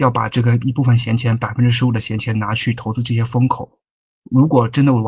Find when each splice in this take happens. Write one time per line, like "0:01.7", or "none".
none